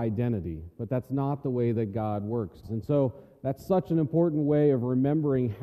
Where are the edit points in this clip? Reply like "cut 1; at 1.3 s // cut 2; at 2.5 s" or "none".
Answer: cut 1; at 2.6 s